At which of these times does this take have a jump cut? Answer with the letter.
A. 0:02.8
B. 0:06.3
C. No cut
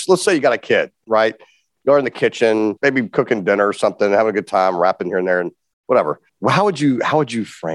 B